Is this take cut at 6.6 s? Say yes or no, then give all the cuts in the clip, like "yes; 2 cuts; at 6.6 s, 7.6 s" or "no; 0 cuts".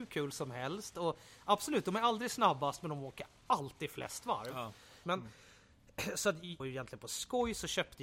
yes; 2 cuts; at 5.0 s, 6.6 s